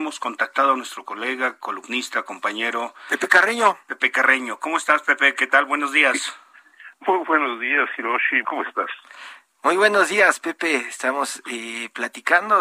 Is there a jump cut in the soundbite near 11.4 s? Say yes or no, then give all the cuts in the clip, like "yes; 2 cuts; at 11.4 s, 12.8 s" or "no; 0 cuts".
no; 1 cut; at 8.4 s